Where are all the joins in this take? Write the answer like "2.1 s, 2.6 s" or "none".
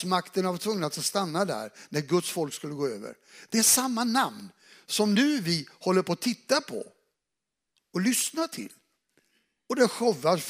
none